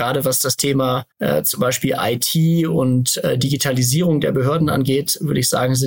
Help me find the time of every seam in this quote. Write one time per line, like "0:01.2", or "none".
0:01.1

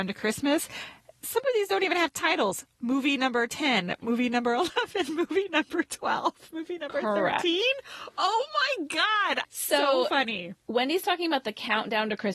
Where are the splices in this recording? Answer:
0:09.4

